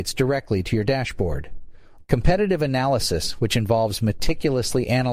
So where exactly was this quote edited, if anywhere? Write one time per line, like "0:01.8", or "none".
0:02.0